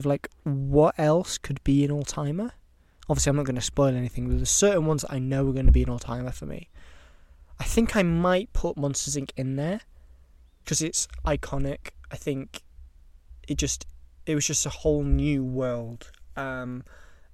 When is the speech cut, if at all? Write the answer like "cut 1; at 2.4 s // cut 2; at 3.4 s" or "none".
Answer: cut 1; at 10.6 s